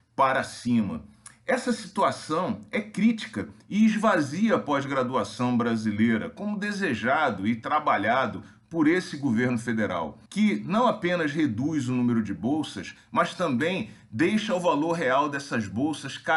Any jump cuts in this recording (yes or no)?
yes